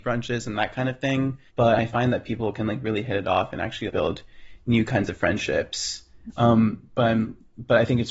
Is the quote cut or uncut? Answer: cut